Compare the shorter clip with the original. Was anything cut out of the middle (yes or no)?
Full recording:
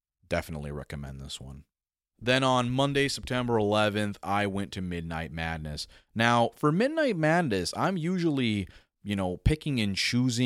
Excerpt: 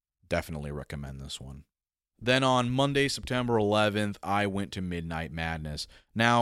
no